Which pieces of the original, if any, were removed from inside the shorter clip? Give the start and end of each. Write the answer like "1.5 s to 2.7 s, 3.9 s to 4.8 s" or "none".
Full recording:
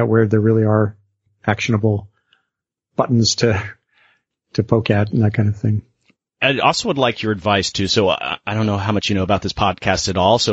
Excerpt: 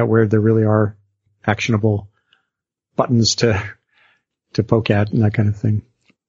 none

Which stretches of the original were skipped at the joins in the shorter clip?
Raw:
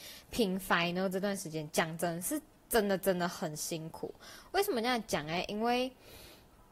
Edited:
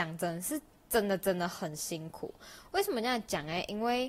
none

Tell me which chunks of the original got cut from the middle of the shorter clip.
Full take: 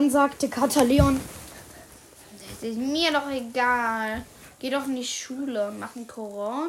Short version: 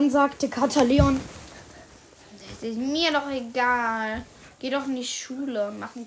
none

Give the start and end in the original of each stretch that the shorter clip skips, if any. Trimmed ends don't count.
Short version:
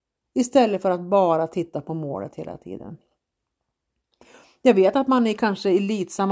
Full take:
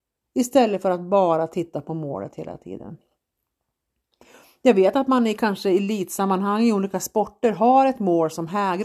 none

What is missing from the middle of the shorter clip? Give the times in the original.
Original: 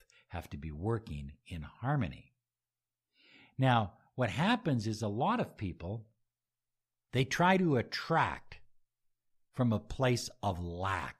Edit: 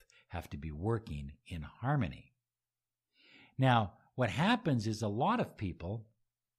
none

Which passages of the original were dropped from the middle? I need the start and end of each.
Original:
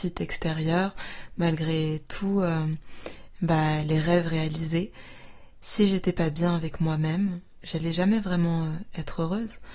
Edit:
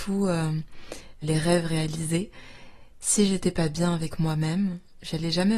3.4 s to 3.8 s

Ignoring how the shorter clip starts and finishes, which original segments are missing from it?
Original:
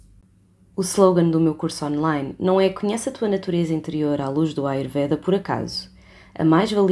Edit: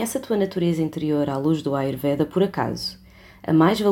none

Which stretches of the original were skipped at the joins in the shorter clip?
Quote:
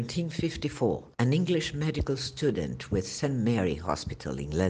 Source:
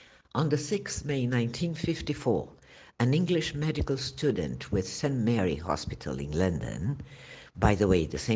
2.6 s to 2.9 s

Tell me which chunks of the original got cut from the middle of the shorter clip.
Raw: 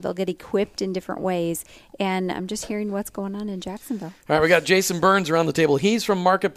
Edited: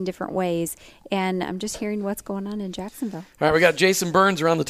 none

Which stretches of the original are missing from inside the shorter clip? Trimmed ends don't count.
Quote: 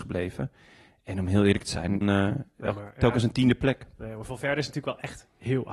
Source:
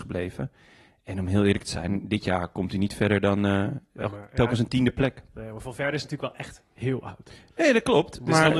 2.0 s to 3.4 s

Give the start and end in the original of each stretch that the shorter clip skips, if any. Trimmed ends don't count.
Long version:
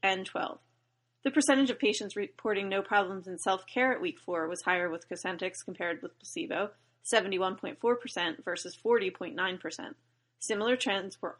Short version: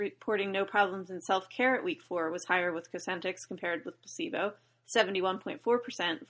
none

